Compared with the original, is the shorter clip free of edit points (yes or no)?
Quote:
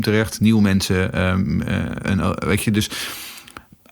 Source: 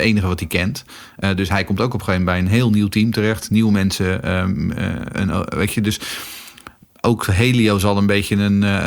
yes